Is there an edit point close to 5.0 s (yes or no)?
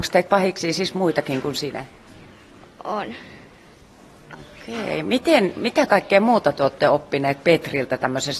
no